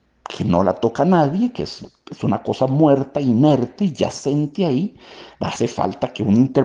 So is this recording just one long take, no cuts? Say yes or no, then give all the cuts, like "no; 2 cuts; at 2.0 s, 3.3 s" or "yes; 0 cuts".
yes; 0 cuts